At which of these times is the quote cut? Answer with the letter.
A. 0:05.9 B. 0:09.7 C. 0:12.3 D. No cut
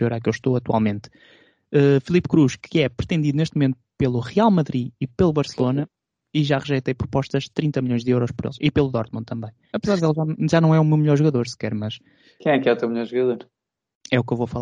B